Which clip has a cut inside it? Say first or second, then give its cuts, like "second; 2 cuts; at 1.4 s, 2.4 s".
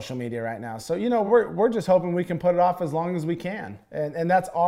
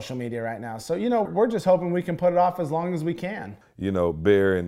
second; 2 cuts; at 1.3 s, 3.6 s